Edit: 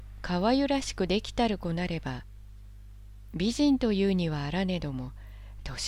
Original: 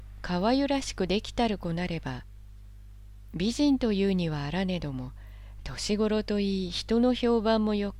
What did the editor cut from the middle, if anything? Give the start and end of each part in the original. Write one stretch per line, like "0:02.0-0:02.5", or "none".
none